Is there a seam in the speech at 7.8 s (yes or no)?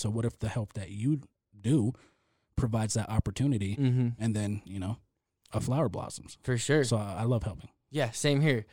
no